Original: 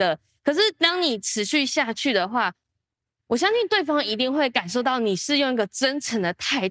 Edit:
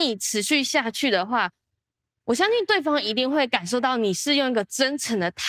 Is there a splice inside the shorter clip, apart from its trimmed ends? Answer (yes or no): no